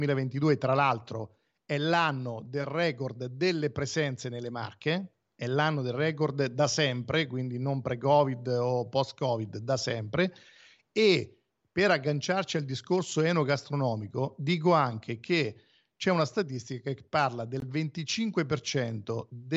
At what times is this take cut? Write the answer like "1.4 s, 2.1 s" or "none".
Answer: none